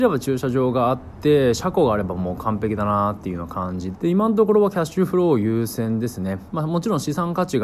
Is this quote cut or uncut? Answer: cut